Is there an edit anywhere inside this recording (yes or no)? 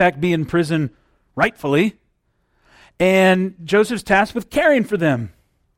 no